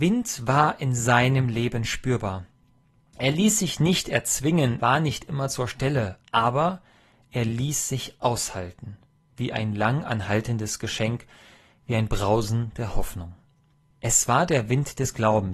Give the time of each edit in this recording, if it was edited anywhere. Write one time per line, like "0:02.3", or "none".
0:04.8